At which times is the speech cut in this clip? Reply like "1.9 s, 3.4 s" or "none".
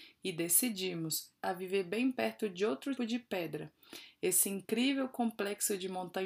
1.4 s, 3.0 s